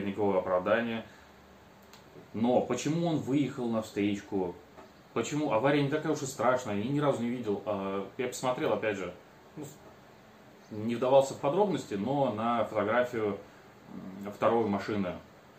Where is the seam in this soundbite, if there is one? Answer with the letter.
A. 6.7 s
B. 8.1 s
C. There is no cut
C